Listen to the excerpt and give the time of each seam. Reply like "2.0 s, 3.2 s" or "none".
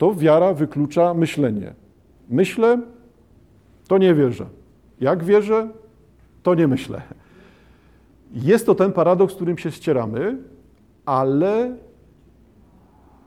none